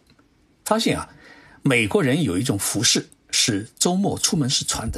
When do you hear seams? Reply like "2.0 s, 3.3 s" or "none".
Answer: none